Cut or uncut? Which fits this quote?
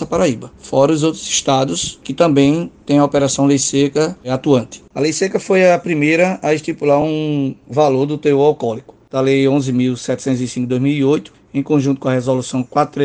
uncut